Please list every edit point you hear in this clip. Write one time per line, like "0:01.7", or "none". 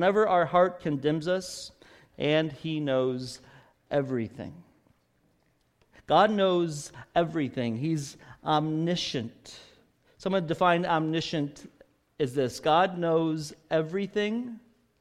0:02.1